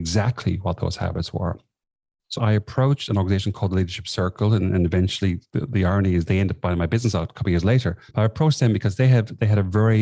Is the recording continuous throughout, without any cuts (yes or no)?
no